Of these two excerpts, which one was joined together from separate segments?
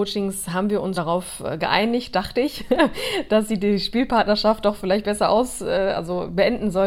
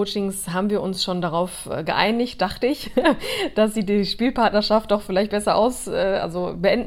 first; 1 cut; at 0.9 s

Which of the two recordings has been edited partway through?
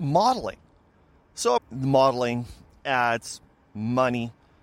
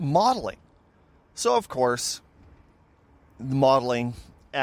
first; 1 cut; at 1.6 s

